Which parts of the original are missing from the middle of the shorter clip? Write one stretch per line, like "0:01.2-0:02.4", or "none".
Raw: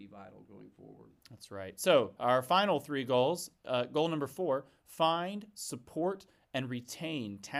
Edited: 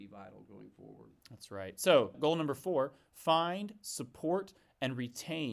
0:02.1-0:03.9